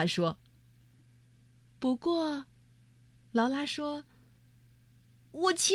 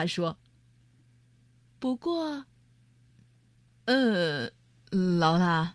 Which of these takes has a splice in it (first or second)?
second